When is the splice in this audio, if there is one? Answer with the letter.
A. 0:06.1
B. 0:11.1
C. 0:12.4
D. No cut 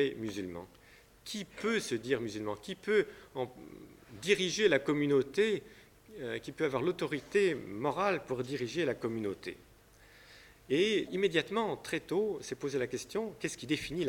B